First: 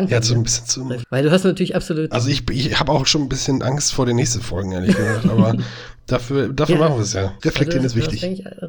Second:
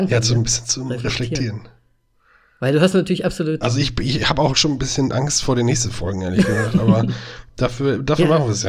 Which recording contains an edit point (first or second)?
first